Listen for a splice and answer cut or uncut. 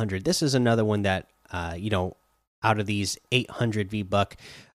uncut